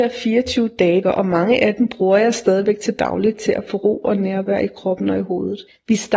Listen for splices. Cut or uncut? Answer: cut